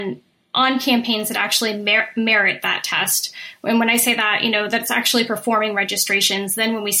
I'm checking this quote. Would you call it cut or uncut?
uncut